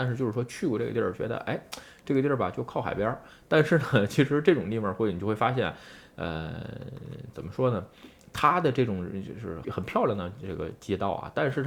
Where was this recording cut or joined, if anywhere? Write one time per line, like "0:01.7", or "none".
0:09.6